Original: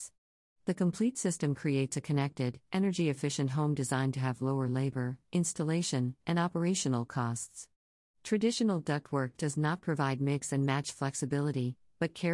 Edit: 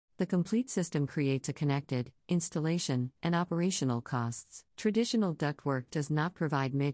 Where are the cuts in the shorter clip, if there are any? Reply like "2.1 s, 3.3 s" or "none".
2.2 s, 4.7 s